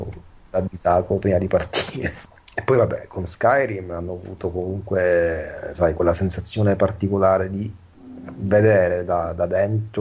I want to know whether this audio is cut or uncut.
uncut